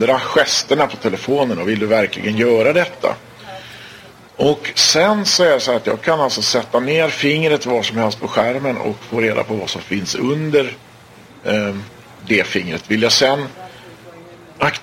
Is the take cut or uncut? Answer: uncut